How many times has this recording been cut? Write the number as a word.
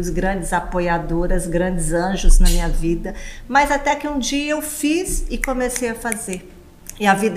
zero